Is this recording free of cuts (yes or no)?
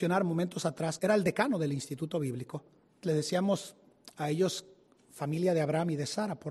no